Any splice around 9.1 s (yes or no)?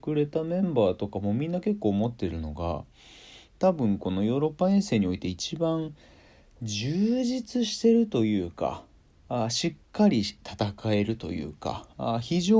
no